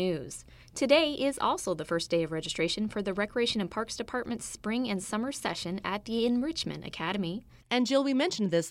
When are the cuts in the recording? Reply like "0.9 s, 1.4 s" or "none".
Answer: 7.6 s